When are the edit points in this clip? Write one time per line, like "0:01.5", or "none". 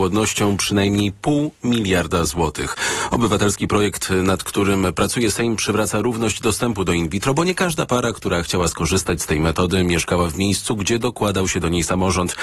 none